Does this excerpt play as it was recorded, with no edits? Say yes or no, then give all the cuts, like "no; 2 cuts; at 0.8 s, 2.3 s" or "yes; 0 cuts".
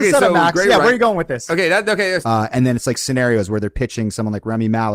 no; 1 cut; at 2.2 s